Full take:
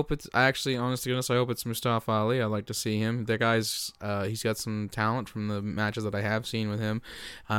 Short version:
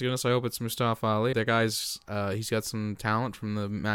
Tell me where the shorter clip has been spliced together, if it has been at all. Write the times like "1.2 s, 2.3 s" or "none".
1.3 s